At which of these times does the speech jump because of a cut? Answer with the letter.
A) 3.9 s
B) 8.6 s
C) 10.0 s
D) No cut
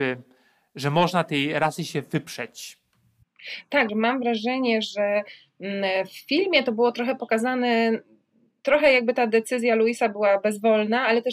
A